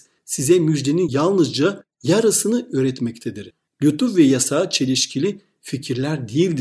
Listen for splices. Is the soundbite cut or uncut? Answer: uncut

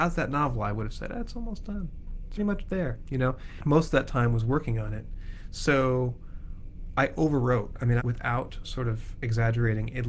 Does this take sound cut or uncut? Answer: cut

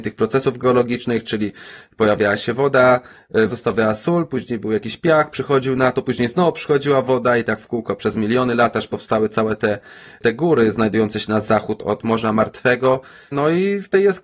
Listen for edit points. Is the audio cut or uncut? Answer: cut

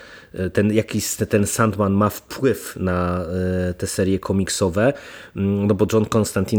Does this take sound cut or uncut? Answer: uncut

